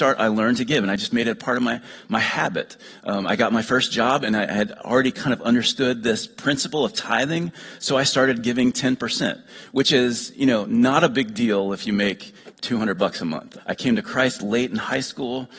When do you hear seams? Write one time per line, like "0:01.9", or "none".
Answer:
0:12.5
0:13.6